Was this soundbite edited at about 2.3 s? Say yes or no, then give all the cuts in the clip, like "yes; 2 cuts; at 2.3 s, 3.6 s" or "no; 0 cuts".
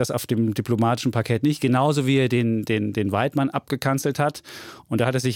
no; 0 cuts